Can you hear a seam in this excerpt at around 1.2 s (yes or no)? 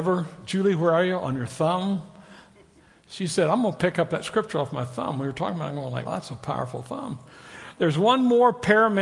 no